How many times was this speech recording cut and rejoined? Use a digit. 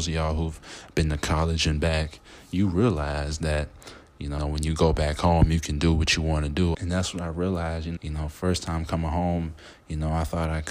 3